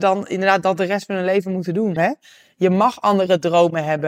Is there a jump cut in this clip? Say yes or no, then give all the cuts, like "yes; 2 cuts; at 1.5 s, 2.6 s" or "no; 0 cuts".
yes; 1 cut; at 2.0 s